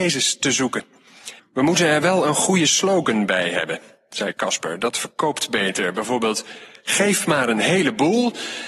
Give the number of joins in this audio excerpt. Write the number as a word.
one